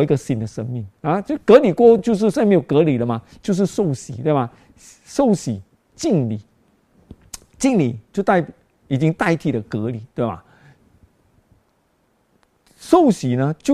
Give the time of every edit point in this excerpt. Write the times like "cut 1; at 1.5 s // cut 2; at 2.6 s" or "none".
none